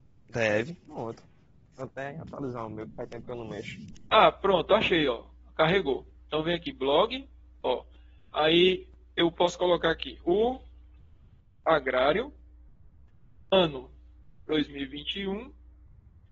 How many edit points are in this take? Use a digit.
0